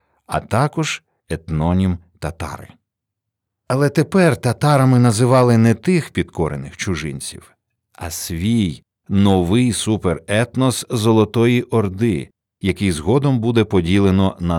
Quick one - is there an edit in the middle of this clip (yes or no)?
no